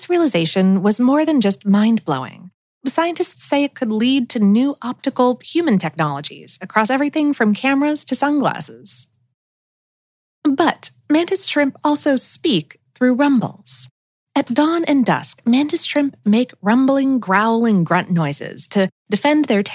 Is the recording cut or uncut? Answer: uncut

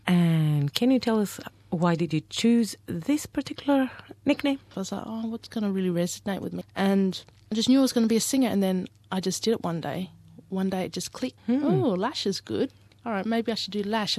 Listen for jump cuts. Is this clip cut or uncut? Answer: cut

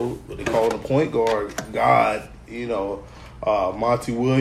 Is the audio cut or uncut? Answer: uncut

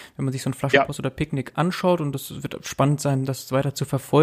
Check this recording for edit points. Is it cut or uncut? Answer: uncut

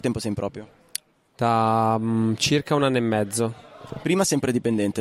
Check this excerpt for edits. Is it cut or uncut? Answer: uncut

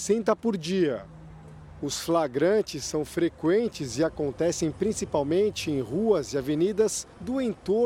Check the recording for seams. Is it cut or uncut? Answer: uncut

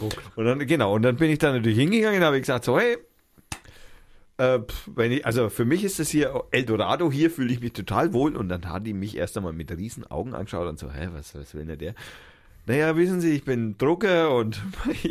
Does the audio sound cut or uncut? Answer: cut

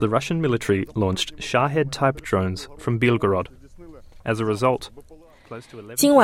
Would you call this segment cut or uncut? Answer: uncut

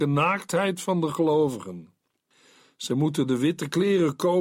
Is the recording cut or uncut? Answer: uncut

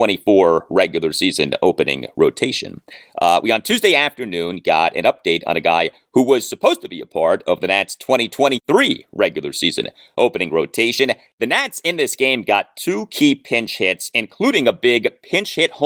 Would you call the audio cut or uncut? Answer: cut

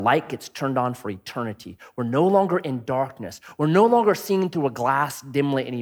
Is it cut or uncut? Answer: uncut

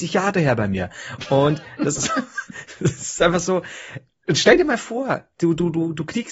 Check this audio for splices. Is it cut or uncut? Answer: cut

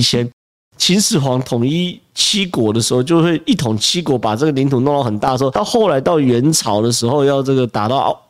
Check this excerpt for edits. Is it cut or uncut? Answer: uncut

